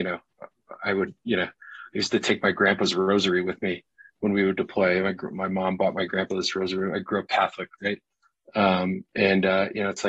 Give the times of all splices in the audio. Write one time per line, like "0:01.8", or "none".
none